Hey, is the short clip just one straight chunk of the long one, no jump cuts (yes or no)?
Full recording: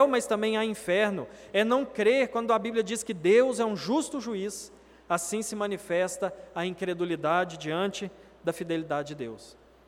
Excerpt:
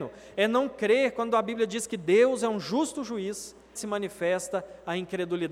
no